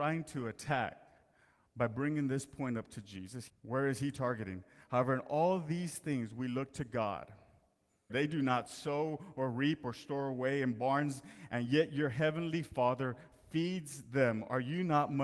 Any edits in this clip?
yes; 2 cuts; at 3.5 s, 8.1 s

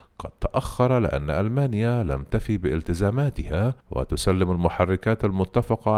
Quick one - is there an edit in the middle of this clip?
yes; 1 cut; at 3.8 s

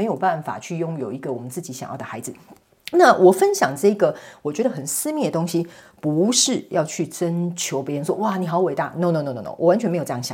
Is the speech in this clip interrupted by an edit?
no; 0 cuts

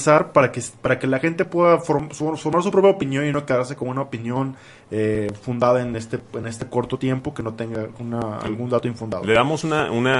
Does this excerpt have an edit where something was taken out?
no; 0 cuts

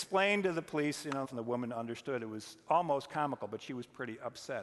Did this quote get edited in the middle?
yes; 1 cut; at 1.2 s

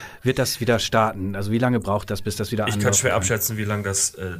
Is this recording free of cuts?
yes; 0 cuts

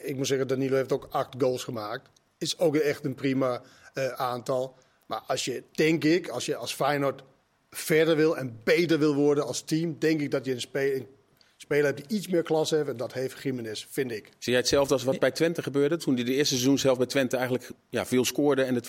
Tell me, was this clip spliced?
no; 0 cuts

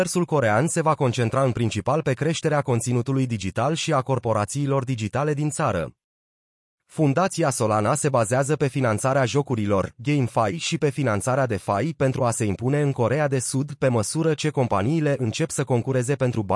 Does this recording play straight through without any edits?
yes; 0 cuts

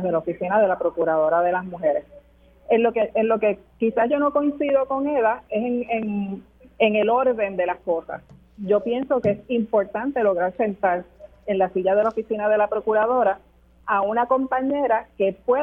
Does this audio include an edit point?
no; 0 cuts

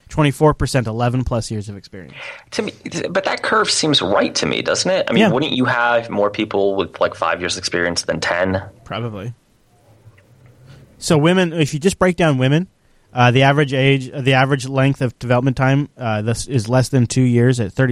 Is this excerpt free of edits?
yes; 0 cuts

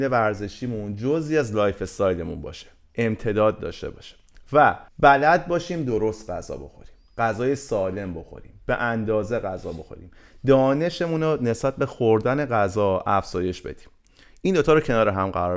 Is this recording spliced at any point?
yes; 1 cut; at 4.9 s

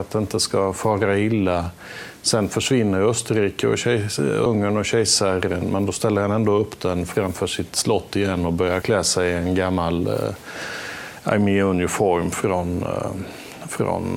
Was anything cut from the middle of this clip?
yes; 2 cuts; at 4.5 s, 8.8 s

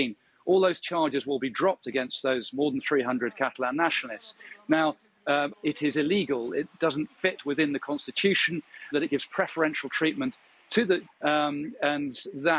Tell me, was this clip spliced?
yes; 3 cuts; at 5.5 s, 8.9 s, 11.1 s

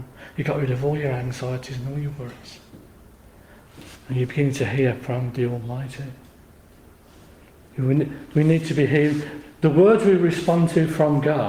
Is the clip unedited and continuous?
no; 1 cut; at 7.6 s

